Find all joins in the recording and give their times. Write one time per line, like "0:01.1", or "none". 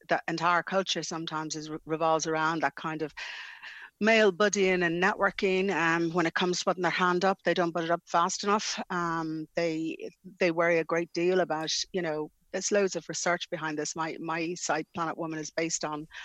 none